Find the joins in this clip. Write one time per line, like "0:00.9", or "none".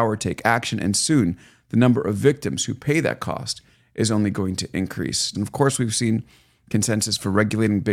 0:05.3